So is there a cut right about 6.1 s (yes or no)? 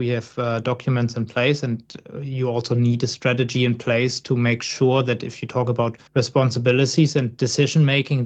yes